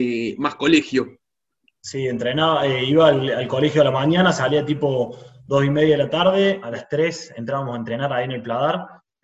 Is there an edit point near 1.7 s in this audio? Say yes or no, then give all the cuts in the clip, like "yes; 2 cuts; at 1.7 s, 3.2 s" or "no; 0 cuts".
no; 0 cuts